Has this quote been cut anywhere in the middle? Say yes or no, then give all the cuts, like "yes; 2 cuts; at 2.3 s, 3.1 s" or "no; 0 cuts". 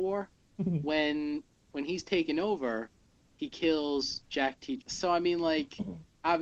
yes; 1 cut; at 4.8 s